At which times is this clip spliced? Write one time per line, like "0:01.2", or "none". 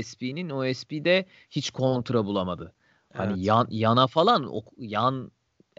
none